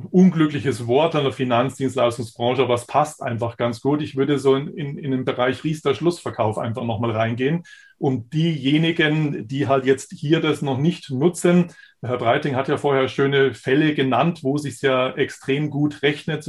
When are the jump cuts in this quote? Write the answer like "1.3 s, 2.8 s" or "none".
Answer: none

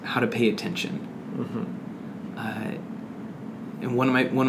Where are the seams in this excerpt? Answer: none

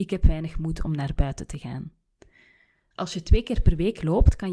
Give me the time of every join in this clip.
2.9 s

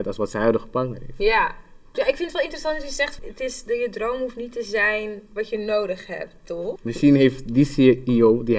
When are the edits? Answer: 1.9 s, 3.2 s, 6.8 s

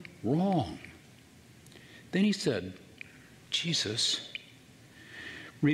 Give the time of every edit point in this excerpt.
none

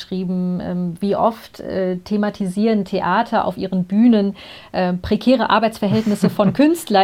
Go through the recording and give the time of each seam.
none

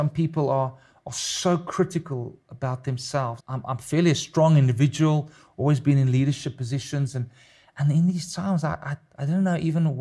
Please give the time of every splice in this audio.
3.4 s

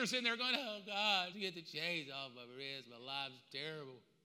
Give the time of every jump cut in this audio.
1.3 s

